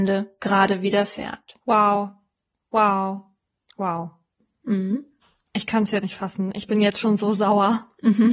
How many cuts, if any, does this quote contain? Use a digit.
1